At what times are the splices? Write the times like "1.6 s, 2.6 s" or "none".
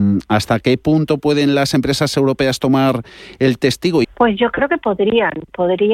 4.0 s